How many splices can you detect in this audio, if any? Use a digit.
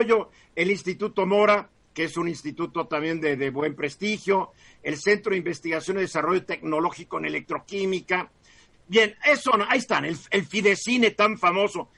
1